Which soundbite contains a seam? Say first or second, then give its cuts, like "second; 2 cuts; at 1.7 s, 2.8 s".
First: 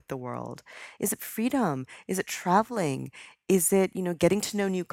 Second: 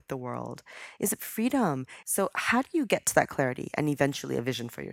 second; 1 cut; at 2.0 s